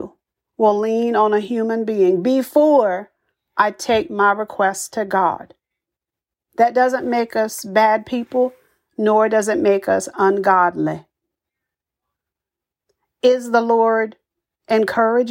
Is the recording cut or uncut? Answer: uncut